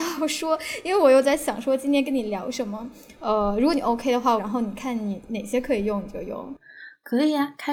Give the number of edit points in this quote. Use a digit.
2